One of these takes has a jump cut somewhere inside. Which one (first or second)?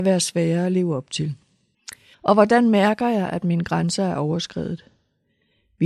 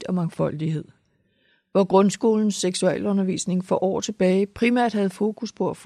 first